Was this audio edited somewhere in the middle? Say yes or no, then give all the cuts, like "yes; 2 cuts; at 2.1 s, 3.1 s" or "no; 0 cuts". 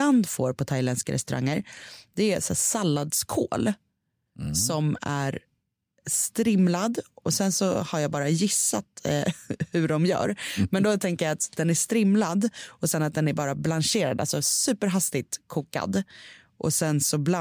no; 0 cuts